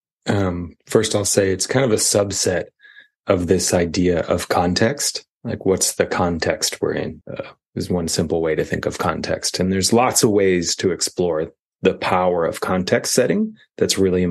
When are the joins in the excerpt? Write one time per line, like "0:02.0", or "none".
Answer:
0:07.2